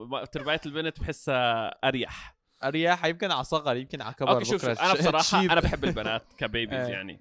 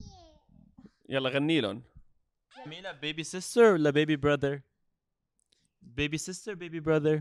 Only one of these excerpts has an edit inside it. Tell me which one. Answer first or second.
second